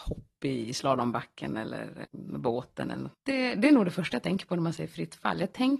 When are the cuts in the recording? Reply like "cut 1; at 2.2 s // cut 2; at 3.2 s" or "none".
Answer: cut 1; at 2.1 s // cut 2; at 3.1 s